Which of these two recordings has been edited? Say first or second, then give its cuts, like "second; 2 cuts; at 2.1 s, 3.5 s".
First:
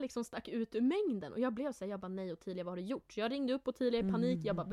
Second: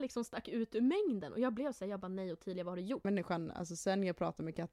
second; 1 cut; at 3.0 s